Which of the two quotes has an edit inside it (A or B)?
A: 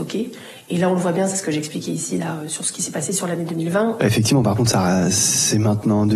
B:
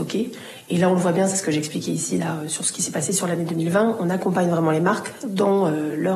A